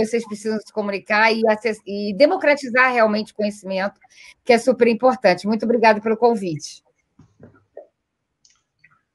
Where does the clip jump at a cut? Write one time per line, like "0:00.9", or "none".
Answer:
none